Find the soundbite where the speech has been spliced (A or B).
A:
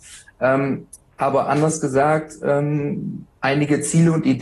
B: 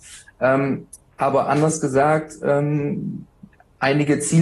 A